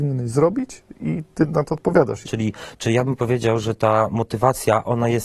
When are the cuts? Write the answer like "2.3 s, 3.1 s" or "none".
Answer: 2.2 s